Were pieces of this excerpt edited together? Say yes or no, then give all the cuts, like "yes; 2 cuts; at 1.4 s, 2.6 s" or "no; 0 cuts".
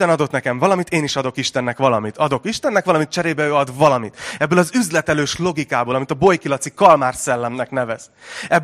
no; 0 cuts